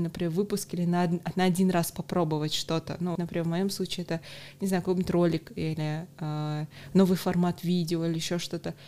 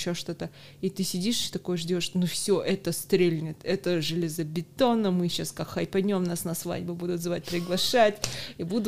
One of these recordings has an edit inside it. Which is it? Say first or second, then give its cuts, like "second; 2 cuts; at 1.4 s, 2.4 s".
first; 1 cut; at 3.2 s